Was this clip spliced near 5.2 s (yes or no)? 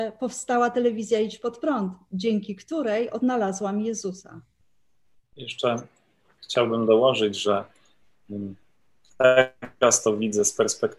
yes